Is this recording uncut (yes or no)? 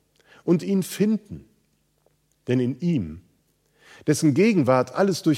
no